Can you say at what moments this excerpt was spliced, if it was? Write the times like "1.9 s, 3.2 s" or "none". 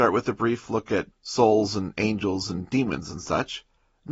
1.1 s